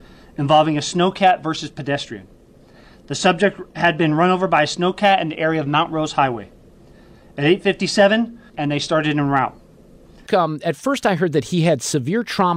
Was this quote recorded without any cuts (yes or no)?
no